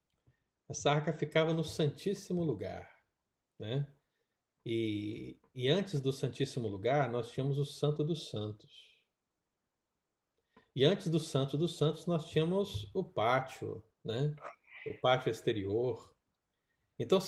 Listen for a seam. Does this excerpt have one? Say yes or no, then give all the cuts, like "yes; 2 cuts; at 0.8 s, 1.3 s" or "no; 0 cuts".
no; 0 cuts